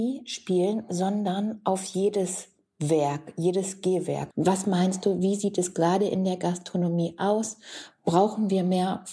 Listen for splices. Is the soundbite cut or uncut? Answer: cut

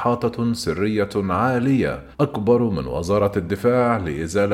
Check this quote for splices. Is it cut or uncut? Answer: cut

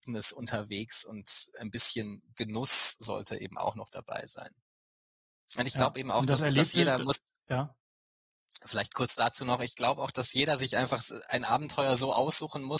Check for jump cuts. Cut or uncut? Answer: uncut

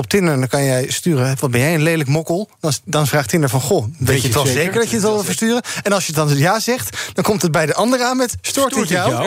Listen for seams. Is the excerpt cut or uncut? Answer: uncut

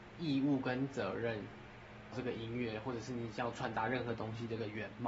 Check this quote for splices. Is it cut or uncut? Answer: cut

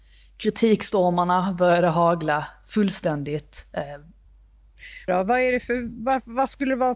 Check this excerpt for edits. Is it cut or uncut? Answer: cut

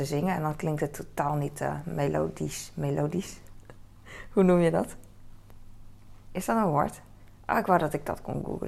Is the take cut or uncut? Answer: uncut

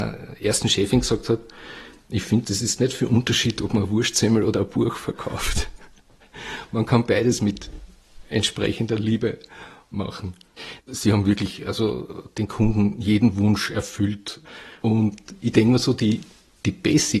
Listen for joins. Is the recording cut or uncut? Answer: cut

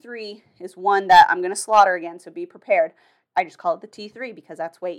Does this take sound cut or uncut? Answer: cut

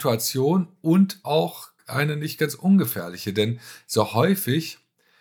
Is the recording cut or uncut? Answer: cut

